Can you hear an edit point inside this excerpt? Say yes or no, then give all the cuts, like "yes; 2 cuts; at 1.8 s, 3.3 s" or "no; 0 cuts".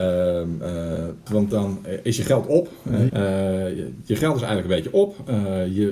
yes; 2 cuts; at 1.3 s, 3.1 s